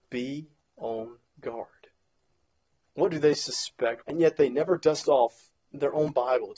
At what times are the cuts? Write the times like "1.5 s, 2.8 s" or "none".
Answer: 2.9 s, 4.0 s